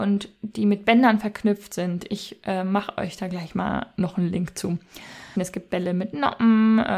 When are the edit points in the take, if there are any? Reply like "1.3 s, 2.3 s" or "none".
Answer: 5.4 s